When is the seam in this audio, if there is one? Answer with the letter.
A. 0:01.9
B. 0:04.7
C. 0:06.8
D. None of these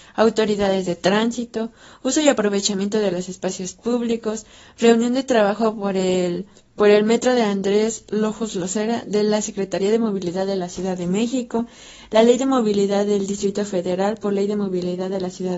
C